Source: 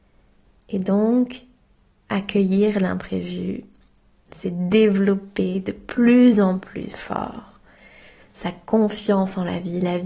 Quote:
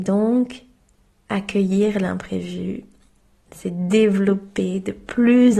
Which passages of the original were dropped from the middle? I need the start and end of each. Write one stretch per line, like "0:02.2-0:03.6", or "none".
none